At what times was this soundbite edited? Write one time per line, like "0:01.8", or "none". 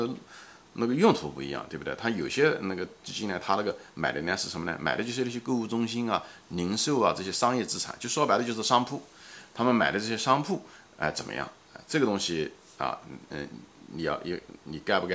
none